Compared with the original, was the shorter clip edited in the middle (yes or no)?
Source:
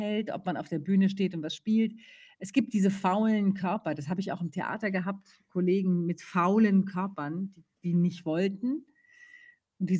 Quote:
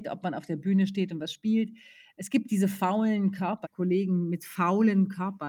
yes